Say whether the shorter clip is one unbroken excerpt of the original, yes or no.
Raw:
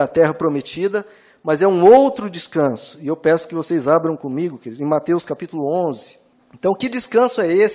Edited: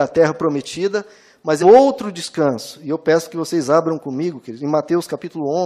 no